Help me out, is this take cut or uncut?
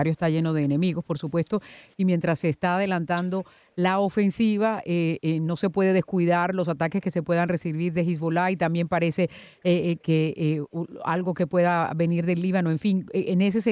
uncut